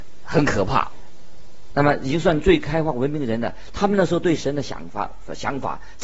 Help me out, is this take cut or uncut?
cut